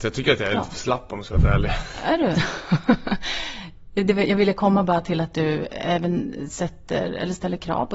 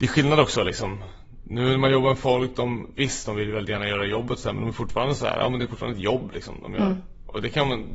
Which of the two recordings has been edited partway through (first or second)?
first